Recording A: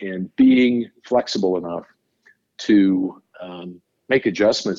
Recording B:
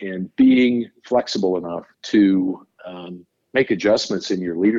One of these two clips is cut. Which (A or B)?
B